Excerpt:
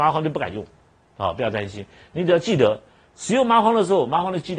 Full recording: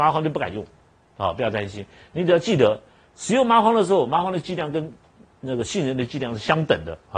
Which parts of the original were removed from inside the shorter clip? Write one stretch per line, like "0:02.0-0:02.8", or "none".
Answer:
none